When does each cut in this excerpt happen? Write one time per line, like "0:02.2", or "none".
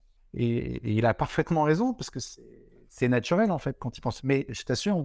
none